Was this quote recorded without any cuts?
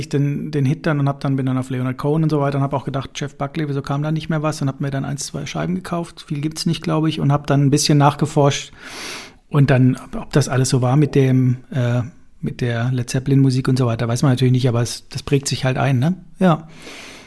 yes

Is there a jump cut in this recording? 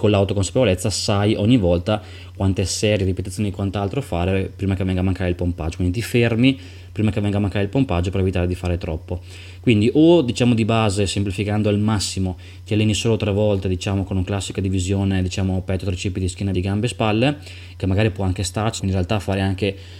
yes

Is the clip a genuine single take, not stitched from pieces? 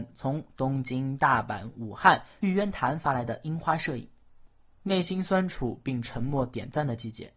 yes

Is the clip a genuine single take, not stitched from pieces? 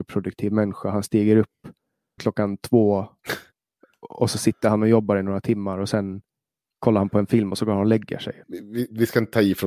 no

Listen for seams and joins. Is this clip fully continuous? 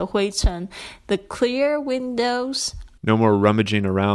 no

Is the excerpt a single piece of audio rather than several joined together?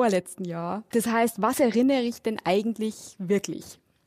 no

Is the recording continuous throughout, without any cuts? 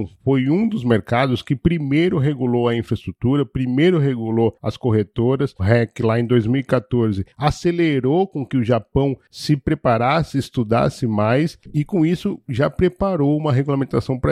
no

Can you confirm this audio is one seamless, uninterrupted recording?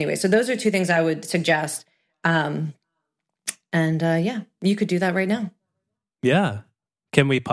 yes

